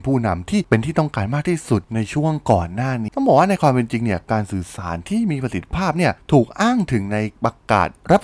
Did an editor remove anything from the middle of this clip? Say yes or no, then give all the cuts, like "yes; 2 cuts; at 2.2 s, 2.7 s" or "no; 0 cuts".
yes; 1 cut; at 3.1 s